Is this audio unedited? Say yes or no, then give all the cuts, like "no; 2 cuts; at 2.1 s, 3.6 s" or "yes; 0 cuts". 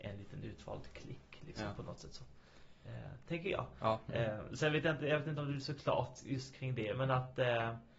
yes; 0 cuts